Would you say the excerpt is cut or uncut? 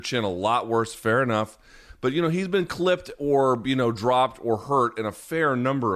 uncut